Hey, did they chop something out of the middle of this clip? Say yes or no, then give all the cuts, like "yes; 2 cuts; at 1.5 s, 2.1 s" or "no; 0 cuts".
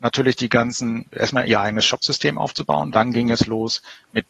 yes; 2 cuts; at 1.1 s, 2.9 s